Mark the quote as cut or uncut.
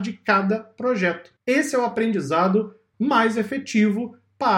cut